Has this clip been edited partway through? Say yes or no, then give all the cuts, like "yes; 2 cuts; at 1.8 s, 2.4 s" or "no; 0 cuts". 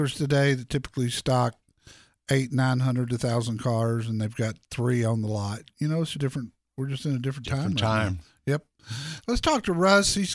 yes; 1 cut; at 6.1 s